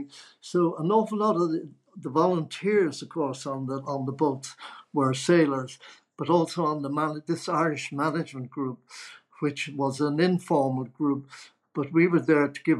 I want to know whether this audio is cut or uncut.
uncut